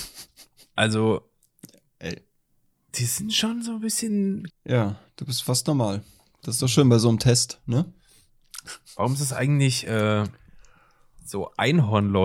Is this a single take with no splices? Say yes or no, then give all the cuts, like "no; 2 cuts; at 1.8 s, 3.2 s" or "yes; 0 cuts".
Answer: no; 1 cut; at 4.5 s